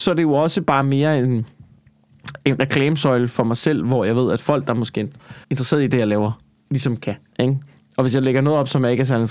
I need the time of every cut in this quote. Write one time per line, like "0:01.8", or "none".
0:05.4
0:07.3